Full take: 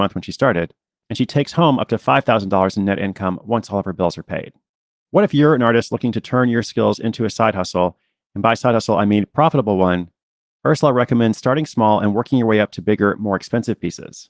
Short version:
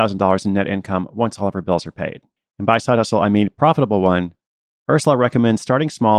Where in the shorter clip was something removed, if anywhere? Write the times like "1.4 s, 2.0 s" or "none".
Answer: 2.4 s